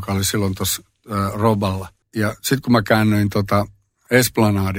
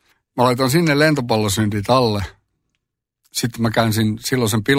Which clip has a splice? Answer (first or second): first